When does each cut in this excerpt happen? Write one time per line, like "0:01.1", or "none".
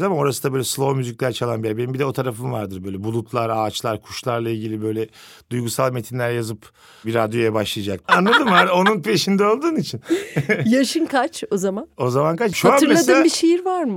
0:08.1
0:12.5